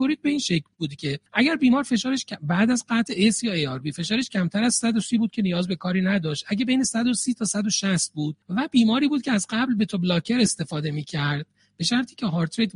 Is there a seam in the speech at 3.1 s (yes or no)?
no